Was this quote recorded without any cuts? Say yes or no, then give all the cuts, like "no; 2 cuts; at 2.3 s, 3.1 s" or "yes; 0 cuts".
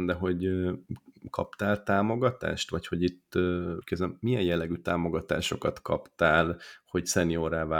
yes; 0 cuts